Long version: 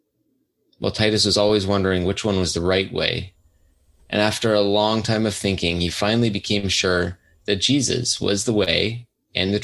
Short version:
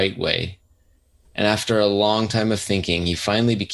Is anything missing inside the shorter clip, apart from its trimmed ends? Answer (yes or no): no